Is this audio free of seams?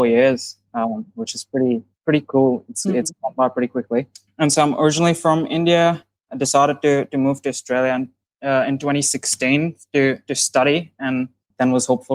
yes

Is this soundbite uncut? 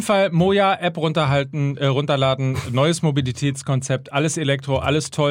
yes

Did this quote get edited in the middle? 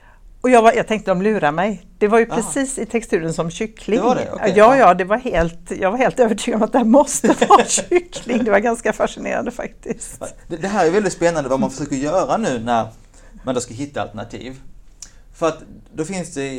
no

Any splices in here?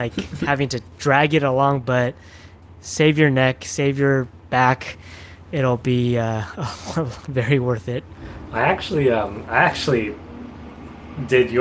no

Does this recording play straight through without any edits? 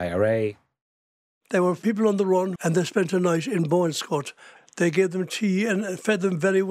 no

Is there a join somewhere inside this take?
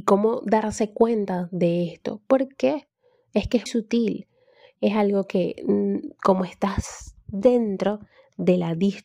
yes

